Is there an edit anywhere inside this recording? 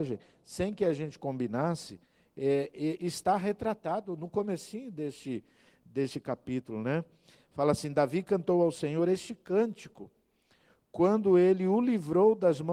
no; 0 cuts

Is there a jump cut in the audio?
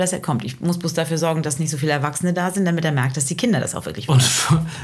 no; 0 cuts

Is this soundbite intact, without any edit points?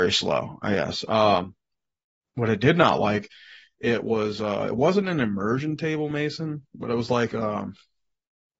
yes; 0 cuts

